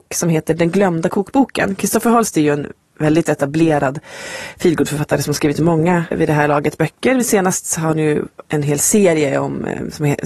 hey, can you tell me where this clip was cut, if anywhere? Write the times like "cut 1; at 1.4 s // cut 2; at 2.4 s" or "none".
cut 1; at 6.1 s